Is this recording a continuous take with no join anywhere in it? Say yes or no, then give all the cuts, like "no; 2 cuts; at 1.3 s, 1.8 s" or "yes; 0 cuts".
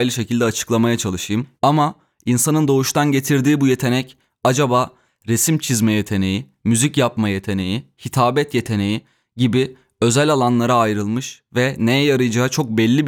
no; 1 cut; at 1.6 s